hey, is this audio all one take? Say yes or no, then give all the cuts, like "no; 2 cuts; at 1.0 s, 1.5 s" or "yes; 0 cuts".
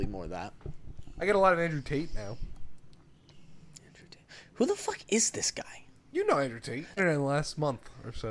no; 1 cut; at 7.0 s